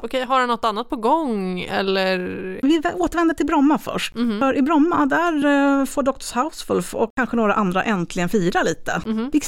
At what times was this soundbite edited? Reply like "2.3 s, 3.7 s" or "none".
none